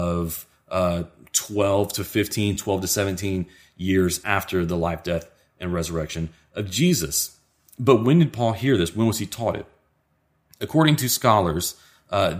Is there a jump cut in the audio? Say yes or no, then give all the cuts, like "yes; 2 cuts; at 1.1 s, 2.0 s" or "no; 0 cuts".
no; 0 cuts